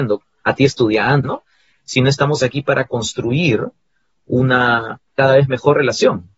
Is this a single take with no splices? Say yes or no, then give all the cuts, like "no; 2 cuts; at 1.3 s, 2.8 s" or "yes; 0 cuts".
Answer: no; 2 cuts; at 1.2 s, 5.1 s